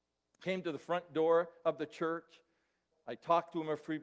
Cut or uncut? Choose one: cut